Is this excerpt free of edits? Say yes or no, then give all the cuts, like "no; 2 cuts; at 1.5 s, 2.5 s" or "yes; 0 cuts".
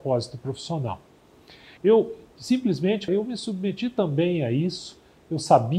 no; 2 cuts; at 1.8 s, 3.1 s